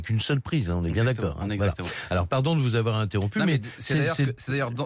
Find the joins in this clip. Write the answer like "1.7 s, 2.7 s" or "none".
none